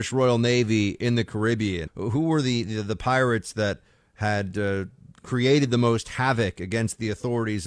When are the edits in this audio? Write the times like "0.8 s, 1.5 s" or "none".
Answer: 1.9 s